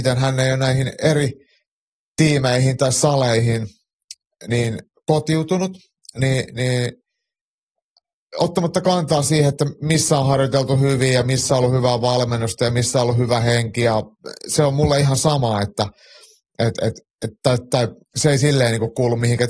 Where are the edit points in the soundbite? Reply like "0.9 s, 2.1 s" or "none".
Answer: none